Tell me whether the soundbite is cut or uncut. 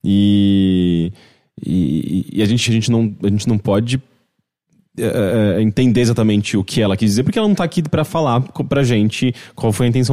cut